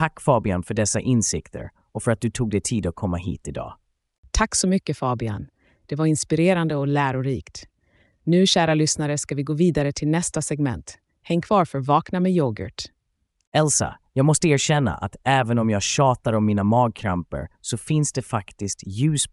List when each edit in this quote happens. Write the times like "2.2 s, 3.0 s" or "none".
none